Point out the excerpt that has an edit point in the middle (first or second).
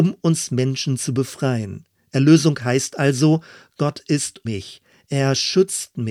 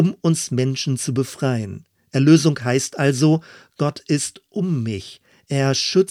first